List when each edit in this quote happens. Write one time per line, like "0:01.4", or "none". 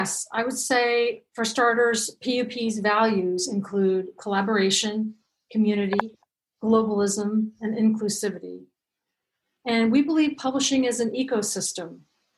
none